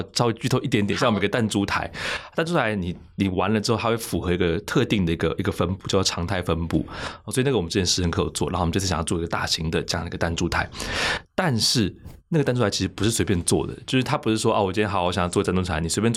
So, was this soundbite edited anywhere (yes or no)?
no